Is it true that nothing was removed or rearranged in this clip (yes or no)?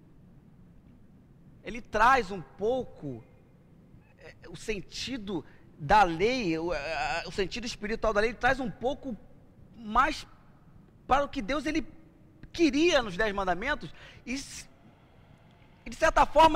no